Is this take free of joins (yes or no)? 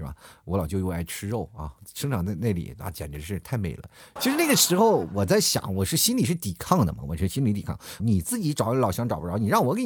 no